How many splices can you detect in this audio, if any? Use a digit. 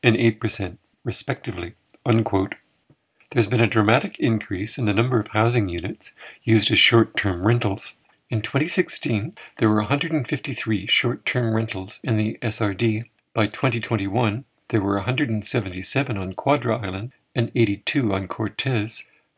1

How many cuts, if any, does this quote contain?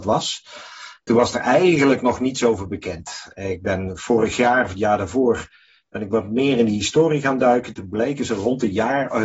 0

